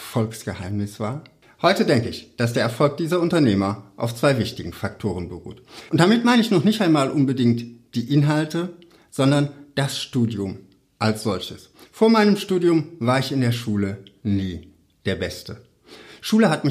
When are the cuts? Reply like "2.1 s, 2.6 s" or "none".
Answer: 5.9 s, 11.9 s